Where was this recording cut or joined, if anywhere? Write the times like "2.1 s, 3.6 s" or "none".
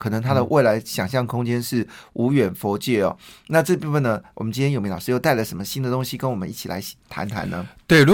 none